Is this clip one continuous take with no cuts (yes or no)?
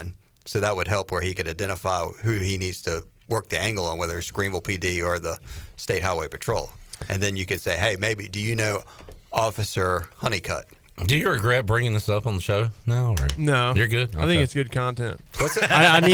yes